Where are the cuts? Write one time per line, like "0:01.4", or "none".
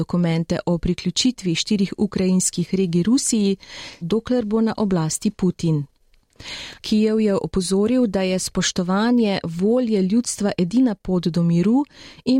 0:04.0
0:06.8